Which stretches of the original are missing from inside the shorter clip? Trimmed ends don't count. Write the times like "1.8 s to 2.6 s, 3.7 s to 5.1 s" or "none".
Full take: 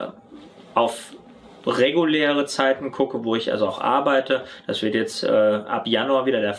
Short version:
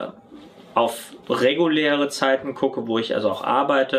1.2 s to 1.6 s